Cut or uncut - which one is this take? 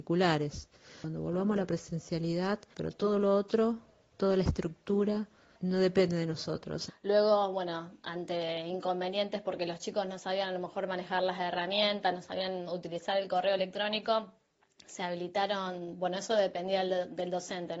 cut